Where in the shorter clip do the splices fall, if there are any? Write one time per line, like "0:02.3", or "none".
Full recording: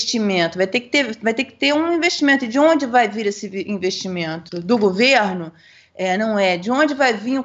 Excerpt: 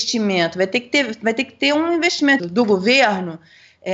0:02.4